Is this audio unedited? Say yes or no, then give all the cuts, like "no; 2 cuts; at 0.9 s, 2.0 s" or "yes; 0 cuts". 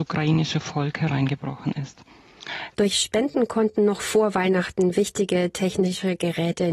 no; 1 cut; at 2.7 s